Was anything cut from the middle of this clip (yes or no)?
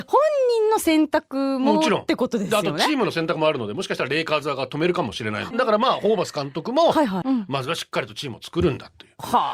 yes